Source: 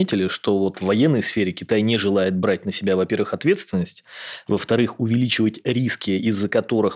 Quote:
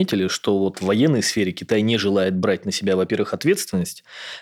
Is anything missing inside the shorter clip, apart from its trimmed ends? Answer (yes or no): no